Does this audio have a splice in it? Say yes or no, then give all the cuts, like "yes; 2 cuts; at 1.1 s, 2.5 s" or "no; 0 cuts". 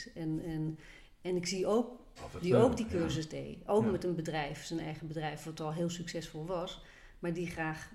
yes; 1 cut; at 2.2 s